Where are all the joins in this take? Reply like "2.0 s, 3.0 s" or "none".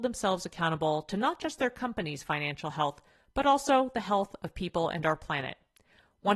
none